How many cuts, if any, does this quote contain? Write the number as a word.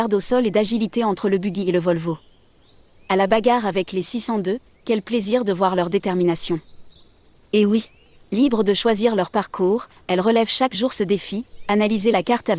one